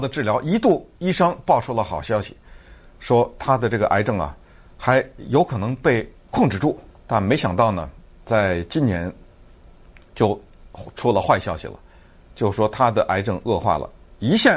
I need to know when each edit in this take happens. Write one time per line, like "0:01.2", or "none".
0:06.9